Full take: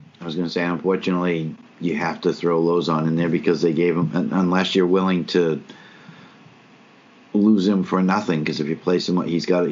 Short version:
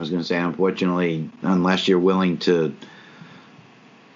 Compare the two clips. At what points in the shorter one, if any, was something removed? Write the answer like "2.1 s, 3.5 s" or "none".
1.4 s